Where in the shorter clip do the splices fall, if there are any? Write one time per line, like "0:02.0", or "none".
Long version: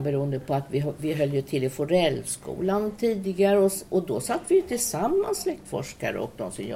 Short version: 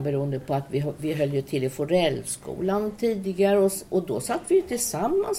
none